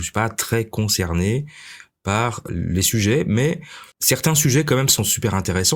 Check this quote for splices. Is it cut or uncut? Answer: cut